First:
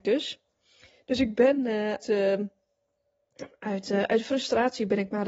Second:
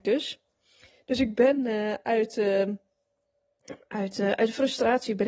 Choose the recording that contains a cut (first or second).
first